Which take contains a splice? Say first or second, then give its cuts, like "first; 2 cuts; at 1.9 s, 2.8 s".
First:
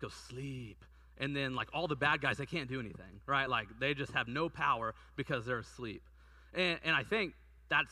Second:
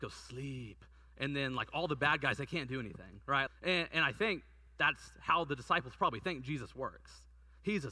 second; 1 cut; at 3.5 s